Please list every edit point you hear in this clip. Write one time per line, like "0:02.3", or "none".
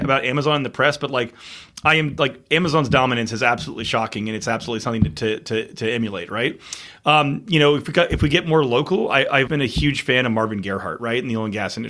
0:09.5